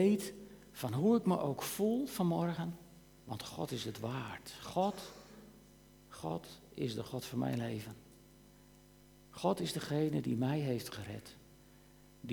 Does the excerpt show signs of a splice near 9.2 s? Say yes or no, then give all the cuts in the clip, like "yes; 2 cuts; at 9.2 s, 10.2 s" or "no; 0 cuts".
no; 1 cut; at 3.2 s